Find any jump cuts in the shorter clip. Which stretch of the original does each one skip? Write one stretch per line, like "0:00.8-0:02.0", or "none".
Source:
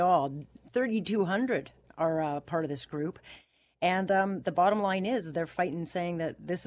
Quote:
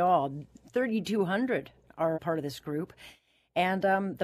0:02.1-0:02.4